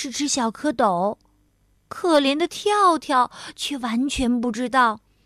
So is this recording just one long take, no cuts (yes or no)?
no